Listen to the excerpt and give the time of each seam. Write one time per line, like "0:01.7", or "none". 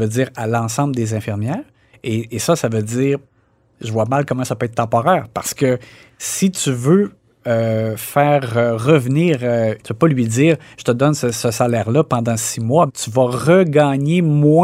0:09.8
0:12.9